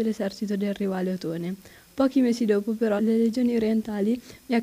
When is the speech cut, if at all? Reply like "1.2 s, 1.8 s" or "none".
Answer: 3.0 s